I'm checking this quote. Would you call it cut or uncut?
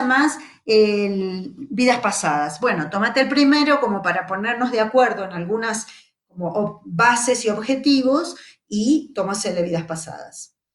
uncut